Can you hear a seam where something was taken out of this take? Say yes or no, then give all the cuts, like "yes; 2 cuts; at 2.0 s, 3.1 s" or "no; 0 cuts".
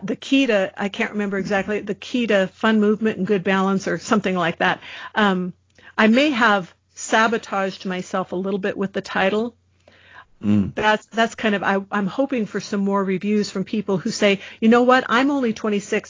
yes; 1 cut; at 10.2 s